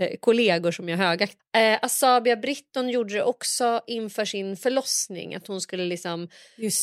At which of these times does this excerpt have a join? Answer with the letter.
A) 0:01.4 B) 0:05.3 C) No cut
A